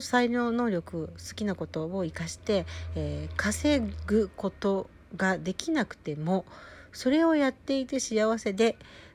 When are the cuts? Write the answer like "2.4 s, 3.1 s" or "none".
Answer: none